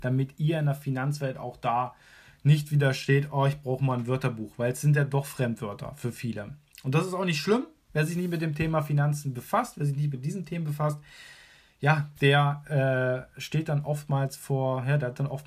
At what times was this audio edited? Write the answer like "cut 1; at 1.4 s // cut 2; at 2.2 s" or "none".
none